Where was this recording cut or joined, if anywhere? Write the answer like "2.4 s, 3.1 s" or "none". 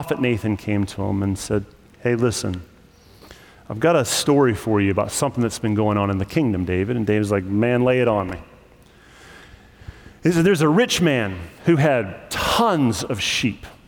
none

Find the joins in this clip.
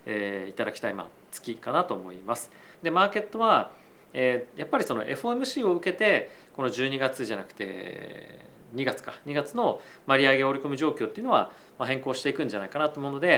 2.7 s

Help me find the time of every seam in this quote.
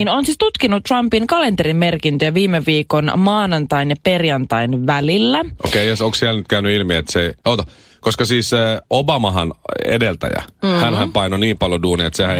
none

